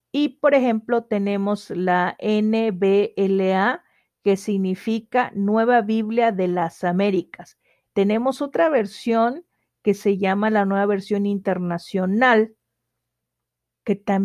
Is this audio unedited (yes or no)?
no